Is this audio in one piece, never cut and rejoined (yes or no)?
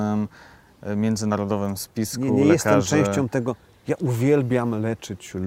yes